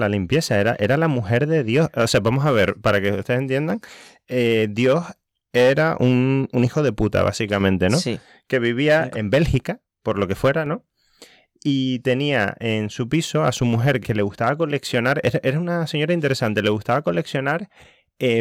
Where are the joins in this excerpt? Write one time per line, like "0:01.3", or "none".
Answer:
0:09.1
0:14.0